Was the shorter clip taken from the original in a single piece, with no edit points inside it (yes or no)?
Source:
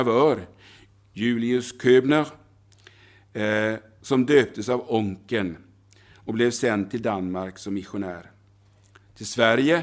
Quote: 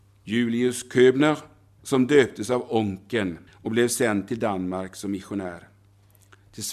no